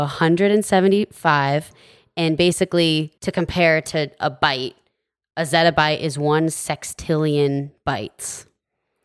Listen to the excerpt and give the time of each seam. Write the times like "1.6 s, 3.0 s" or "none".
3.2 s